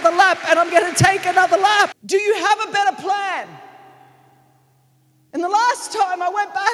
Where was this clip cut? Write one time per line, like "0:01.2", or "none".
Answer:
0:01.9
0:05.3